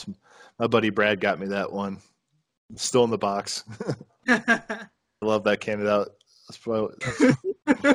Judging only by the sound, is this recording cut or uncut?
cut